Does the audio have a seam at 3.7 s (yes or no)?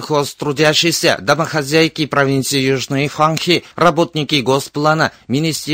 yes